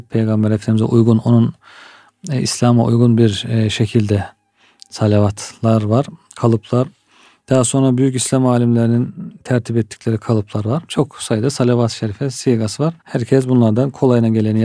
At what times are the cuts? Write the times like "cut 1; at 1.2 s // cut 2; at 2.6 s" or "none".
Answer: cut 1; at 13.0 s